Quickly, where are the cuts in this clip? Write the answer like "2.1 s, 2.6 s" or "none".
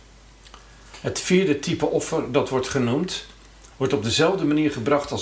3.7 s